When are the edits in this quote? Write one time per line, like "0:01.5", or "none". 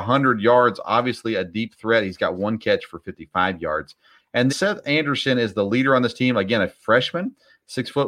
0:04.5

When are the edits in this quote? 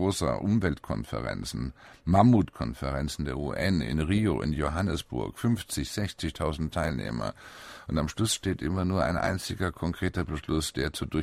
none

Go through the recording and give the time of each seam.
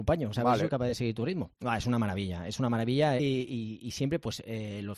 0:01.5
0:03.2

